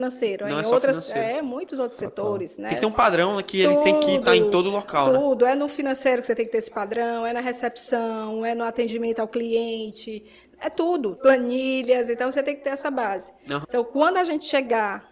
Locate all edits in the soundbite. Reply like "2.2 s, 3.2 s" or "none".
11.2 s, 13.6 s